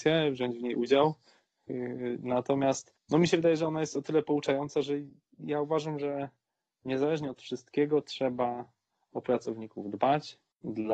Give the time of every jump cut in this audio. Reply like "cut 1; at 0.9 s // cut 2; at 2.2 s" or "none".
none